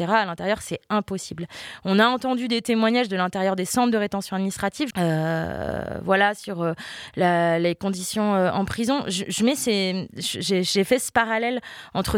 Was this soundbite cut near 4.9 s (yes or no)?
yes